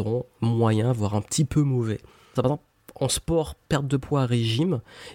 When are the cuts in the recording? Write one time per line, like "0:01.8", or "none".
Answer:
0:02.4